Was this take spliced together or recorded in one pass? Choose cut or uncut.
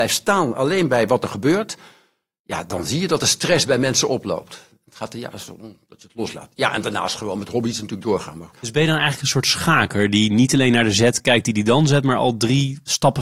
cut